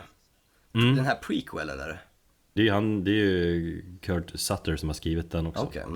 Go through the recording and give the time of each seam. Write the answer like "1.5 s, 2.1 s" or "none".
2.6 s

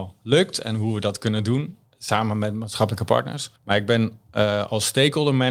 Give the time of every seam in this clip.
3.6 s

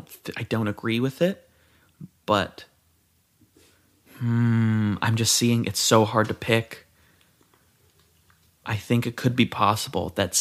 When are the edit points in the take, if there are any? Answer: none

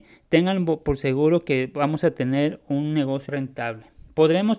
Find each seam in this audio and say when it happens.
3.3 s

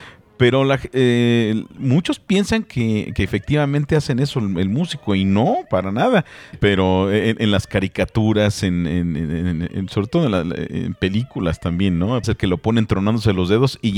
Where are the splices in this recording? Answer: 6.5 s, 12.2 s

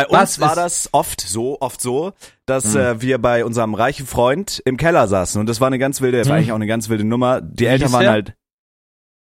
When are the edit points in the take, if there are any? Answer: 6.2 s

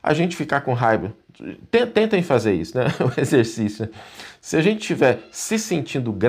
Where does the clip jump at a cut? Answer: none

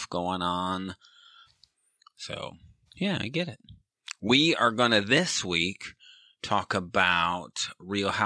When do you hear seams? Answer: 1.4 s, 2.9 s

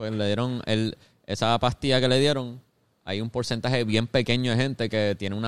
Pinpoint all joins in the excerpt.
none

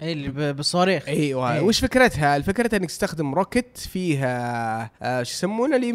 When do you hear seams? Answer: 4.9 s

